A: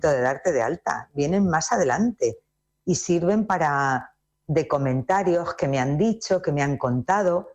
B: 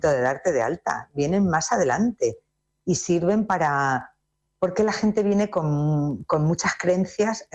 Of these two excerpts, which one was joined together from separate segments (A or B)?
A